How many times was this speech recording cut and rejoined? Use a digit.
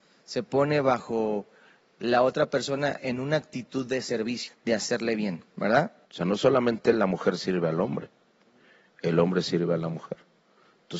2